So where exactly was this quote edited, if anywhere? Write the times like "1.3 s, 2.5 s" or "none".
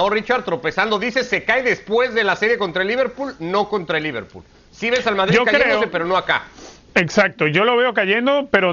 none